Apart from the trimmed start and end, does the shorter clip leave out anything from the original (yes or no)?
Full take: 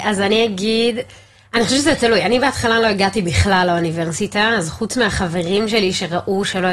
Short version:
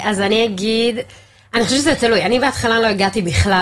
no